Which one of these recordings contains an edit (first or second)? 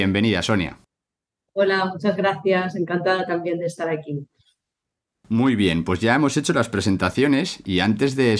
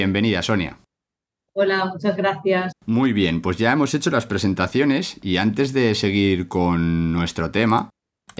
second